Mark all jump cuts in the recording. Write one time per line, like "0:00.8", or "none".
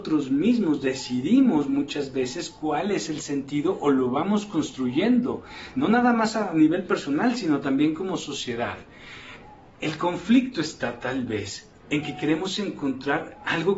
none